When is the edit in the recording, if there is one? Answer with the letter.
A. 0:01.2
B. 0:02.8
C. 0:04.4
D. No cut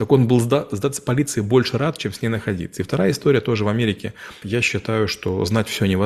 C